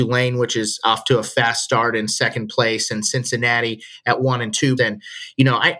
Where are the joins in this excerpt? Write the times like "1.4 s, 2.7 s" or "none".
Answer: 4.8 s